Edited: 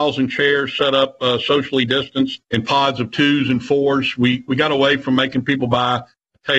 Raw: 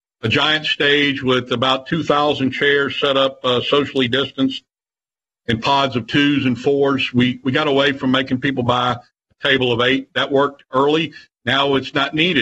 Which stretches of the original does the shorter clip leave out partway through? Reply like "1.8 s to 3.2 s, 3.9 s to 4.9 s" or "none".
4.7 s to 5.4 s